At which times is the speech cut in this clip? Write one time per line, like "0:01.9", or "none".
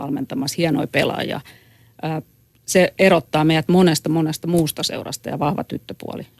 none